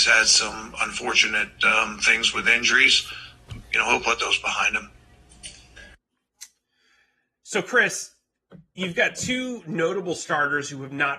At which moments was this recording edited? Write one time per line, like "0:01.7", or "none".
0:03.6